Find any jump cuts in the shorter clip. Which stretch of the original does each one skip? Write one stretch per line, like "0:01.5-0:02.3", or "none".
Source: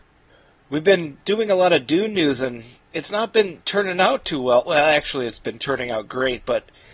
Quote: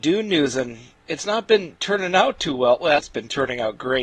0:04.8-0:05.3